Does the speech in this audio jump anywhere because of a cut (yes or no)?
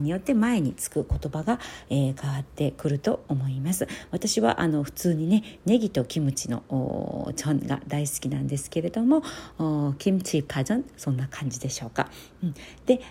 no